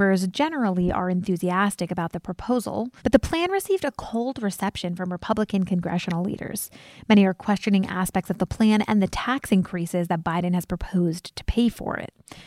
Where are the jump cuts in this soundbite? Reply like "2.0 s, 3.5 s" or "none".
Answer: 3.0 s